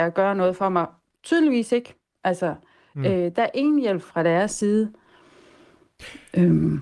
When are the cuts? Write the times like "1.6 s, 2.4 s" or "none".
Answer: none